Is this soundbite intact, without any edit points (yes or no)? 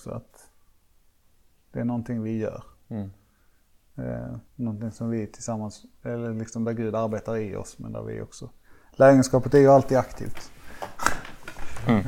no